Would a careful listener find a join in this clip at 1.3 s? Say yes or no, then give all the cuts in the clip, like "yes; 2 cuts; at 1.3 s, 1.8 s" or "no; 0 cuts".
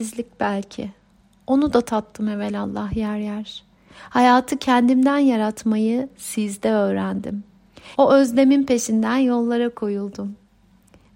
no; 1 cut; at 7.9 s